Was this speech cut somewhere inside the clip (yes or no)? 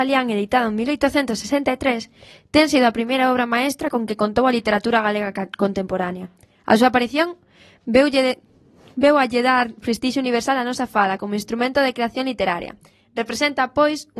no